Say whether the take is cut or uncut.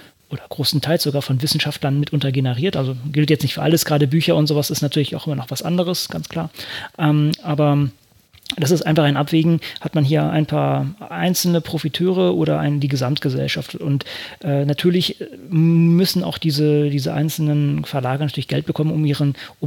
uncut